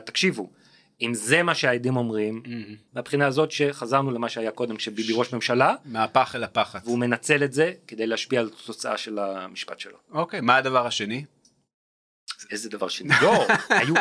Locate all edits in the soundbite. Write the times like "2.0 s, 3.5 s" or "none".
2.9 s

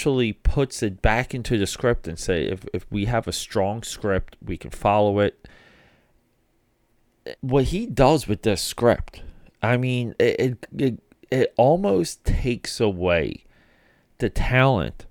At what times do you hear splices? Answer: 7.4 s

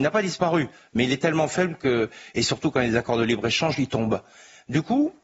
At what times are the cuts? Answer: none

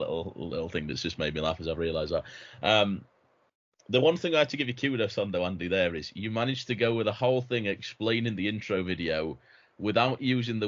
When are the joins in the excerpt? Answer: none

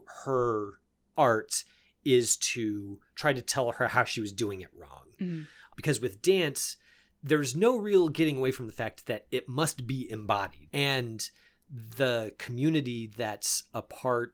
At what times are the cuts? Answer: 5.7 s, 10.7 s

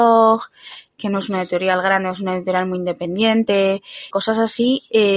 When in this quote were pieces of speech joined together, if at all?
4.1 s

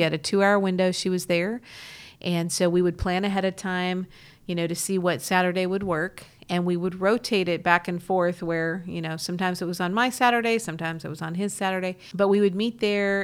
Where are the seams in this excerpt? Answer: none

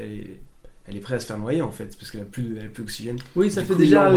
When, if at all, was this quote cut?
none

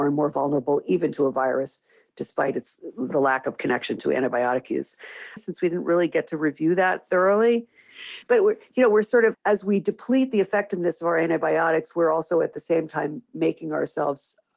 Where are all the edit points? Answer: 5.4 s, 8.2 s, 9.3 s

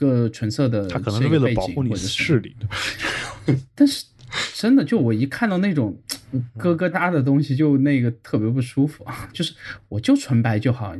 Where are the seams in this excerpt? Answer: 6.9 s, 9.3 s

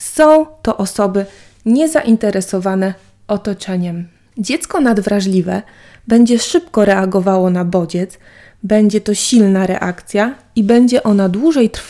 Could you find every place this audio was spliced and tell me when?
4.3 s

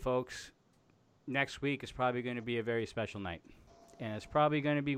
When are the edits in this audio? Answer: none

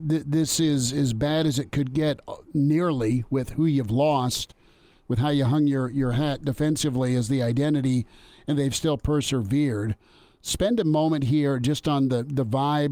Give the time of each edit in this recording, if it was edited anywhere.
none

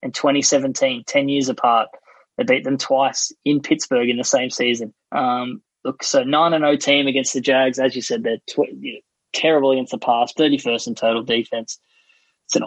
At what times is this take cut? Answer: 5.0 s, 10.3 s

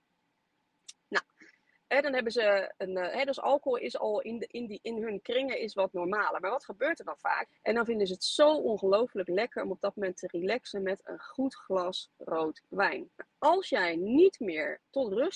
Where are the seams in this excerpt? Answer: 7.5 s, 13.1 s

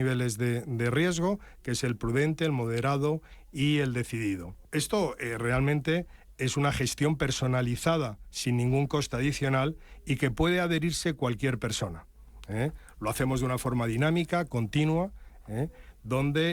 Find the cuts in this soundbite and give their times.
none

